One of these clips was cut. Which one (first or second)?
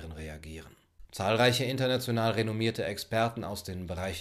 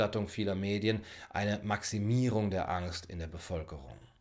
first